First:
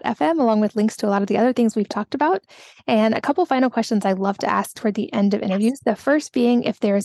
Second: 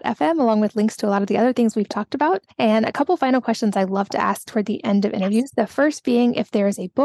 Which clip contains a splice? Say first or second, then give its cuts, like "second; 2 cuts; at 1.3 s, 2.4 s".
second; 1 cut; at 2.5 s